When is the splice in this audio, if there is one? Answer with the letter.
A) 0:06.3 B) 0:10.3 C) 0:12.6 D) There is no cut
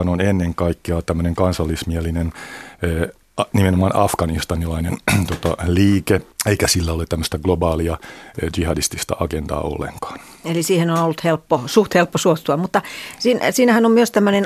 A